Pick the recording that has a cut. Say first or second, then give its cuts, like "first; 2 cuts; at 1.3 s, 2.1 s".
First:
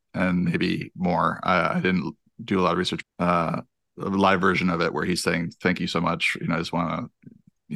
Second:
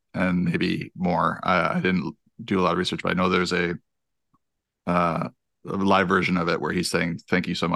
first; 1 cut; at 3.0 s